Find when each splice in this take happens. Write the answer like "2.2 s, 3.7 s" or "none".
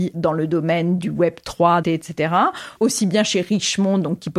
1.8 s